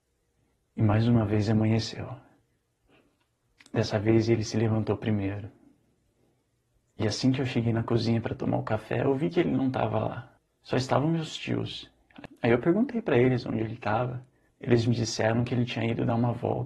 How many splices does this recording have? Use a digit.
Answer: 0